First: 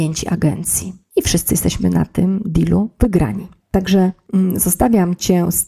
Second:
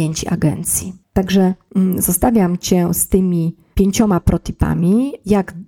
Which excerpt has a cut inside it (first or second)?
second